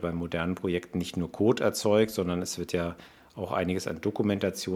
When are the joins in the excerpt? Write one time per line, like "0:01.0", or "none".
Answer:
none